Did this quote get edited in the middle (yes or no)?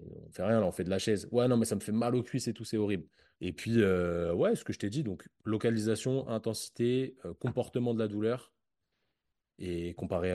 yes